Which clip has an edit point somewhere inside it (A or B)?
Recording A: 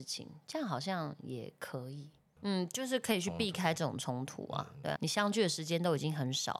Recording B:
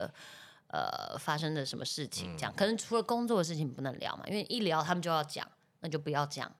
A